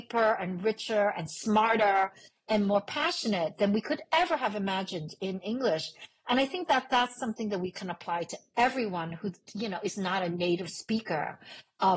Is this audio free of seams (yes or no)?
yes